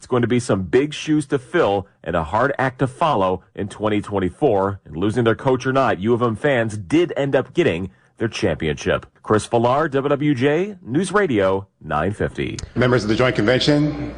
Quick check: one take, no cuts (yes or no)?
no